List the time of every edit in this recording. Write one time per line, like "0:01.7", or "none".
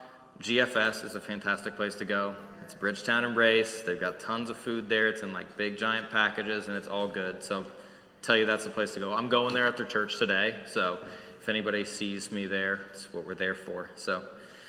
none